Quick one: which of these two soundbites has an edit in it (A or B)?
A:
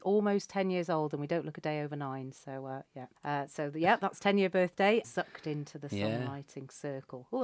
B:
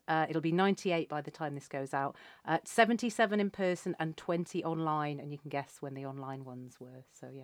A